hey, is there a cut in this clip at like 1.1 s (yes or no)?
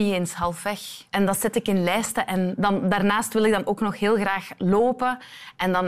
yes